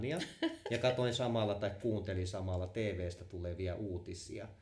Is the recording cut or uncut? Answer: uncut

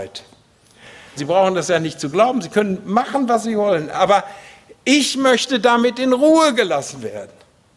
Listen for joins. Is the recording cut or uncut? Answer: cut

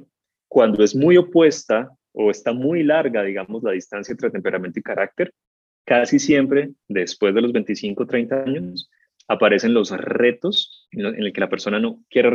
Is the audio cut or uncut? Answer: cut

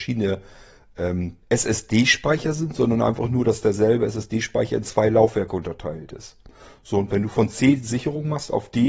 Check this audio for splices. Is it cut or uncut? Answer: cut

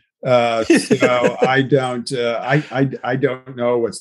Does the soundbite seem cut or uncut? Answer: uncut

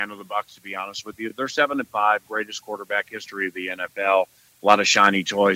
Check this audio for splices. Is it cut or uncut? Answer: uncut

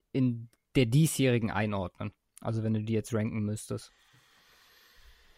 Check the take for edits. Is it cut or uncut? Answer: uncut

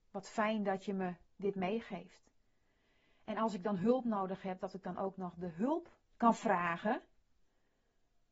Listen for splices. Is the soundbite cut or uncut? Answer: cut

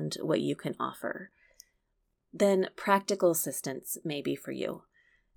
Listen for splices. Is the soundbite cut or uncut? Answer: uncut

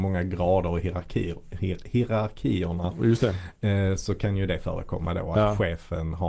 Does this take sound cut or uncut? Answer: uncut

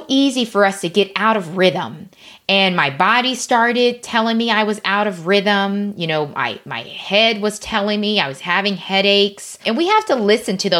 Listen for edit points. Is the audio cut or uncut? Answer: uncut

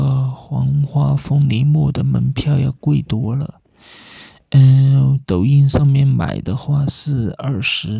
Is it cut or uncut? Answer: uncut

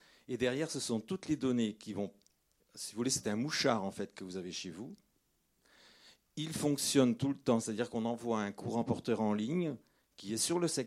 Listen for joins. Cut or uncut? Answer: uncut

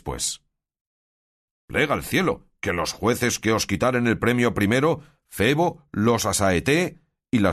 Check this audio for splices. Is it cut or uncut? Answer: cut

